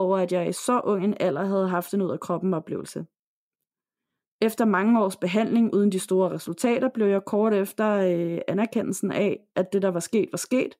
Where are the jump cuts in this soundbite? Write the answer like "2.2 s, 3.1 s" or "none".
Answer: 4.3 s